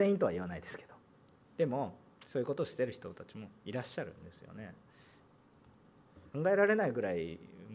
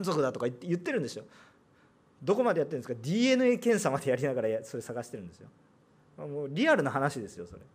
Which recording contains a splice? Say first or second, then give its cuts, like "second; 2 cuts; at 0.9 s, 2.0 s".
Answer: first; 1 cut; at 6.3 s